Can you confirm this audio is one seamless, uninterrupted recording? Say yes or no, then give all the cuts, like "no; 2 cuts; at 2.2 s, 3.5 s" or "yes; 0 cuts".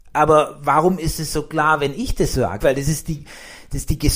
no; 1 cut; at 2.6 s